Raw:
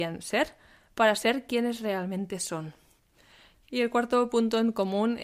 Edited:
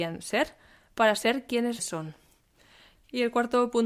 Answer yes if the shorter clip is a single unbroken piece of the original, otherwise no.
no